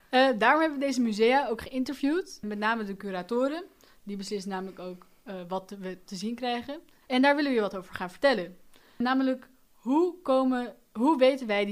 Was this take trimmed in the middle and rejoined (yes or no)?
yes